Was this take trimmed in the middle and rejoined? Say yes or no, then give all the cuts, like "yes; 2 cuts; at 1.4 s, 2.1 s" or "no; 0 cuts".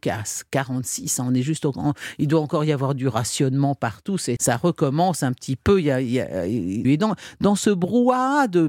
yes; 2 cuts; at 4.4 s, 6.8 s